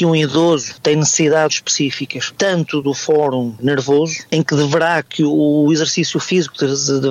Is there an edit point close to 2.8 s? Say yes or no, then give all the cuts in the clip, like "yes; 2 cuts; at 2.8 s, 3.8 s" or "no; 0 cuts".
yes; 2 cuts; at 1.5 s, 2.8 s